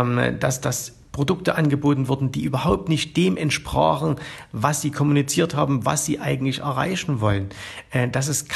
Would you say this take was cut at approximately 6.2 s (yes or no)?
no